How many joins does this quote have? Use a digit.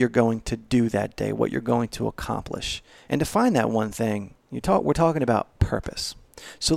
1